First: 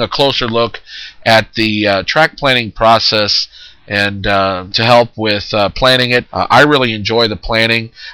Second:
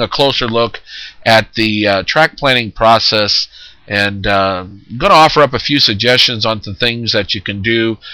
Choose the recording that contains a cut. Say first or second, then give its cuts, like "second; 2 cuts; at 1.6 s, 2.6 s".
first; 2 cuts; at 4.7 s, 6.2 s